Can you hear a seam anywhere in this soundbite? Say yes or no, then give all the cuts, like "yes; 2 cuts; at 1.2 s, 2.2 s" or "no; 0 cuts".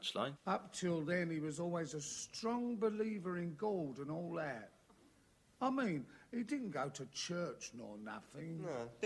no; 0 cuts